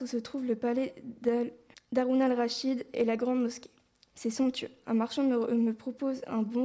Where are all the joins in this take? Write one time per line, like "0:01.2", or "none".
0:04.8

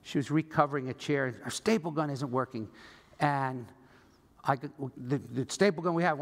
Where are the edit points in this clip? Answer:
0:04.9

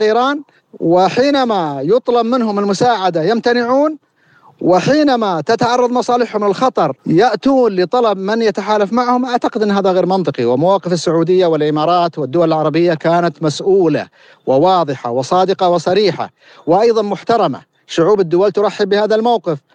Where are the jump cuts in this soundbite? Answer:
0:07.0

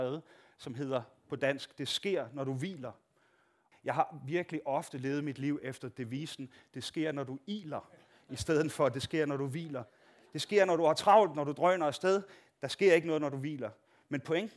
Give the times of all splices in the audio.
0:03.7

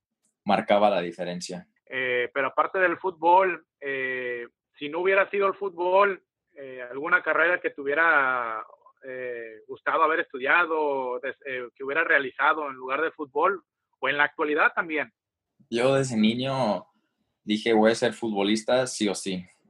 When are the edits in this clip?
0:01.8

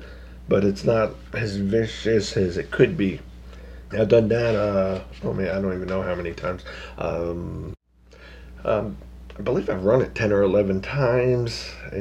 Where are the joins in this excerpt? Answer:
0:03.9

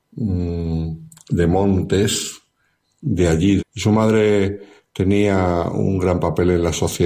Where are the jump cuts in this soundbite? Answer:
0:03.6

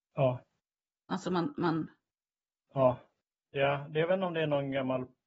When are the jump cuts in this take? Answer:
0:01.1
0:03.3

